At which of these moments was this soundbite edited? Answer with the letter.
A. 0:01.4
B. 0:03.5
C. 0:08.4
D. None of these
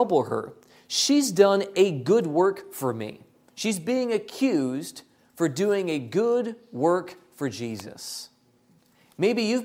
D